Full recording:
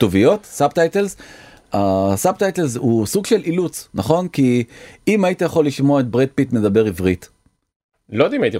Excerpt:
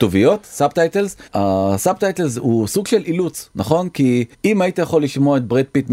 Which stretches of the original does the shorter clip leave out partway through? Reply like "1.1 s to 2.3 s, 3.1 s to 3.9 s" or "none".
1.3 s to 1.7 s, 4.7 s to 5.0 s